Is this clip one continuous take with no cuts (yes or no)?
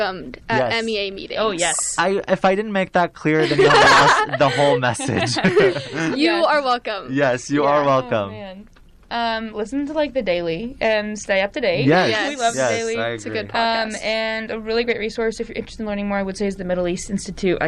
yes